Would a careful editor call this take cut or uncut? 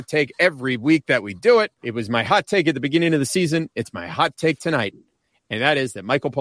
cut